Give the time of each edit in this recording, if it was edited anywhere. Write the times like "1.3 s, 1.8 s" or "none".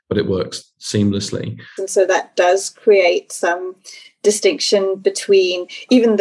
1.8 s